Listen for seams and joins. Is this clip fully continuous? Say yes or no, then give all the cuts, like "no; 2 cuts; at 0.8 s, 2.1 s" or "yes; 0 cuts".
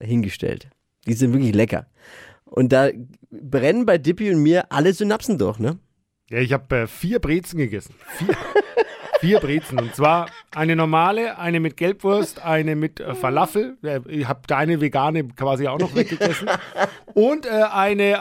yes; 0 cuts